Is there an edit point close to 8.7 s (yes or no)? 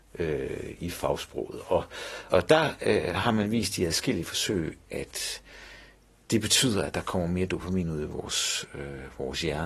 no